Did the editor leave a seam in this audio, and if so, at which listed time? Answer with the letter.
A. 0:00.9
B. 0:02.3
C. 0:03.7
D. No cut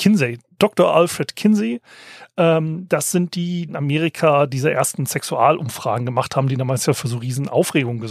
C